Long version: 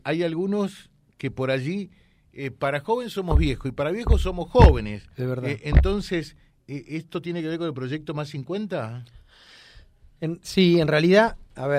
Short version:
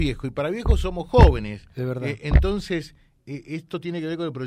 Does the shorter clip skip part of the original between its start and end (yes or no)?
no